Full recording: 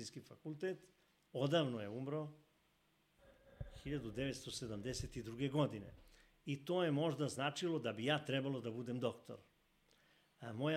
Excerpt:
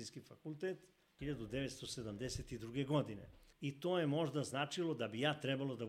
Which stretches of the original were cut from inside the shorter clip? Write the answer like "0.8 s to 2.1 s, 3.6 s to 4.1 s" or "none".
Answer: 1.2 s to 3.8 s, 6.2 s to 6.4 s